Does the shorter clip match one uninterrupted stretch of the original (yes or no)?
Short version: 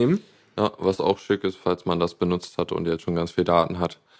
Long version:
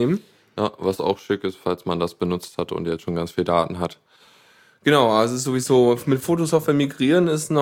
yes